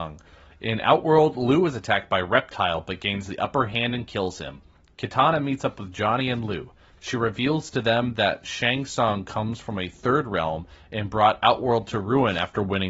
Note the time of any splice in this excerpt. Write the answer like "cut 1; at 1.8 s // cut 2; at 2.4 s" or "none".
none